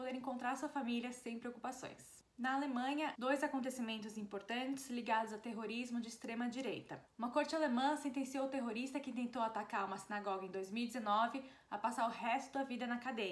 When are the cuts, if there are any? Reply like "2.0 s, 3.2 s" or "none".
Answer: 3.1 s